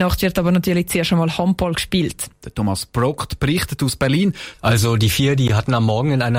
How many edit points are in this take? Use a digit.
2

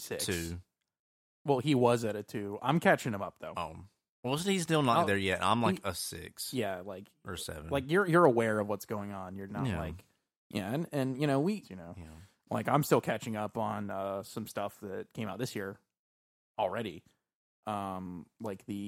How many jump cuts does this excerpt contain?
2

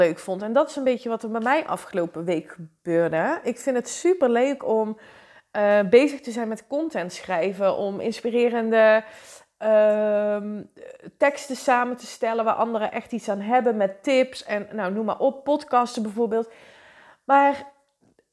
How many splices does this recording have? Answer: 0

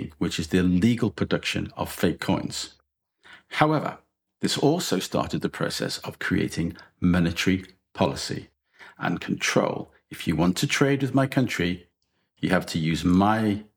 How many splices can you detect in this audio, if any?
0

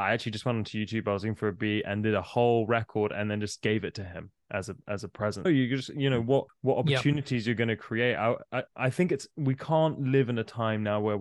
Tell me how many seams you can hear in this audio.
2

